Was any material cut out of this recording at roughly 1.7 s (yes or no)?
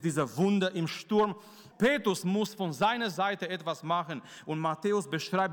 yes